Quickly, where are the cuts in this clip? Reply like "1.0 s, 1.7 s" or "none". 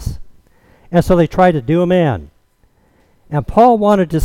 none